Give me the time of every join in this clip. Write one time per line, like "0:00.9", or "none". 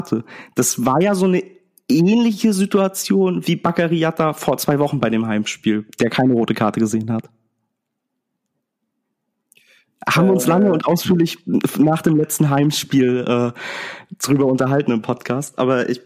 none